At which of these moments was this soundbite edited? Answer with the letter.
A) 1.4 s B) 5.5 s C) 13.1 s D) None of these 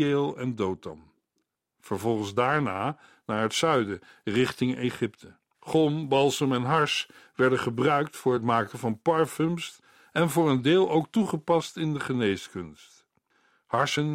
B